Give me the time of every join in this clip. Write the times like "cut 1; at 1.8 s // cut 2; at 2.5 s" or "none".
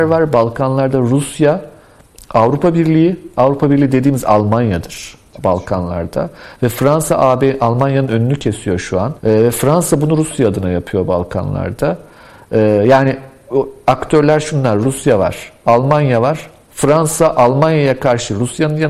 cut 1; at 9.2 s